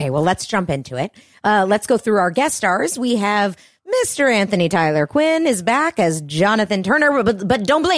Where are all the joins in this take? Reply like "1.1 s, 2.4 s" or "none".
none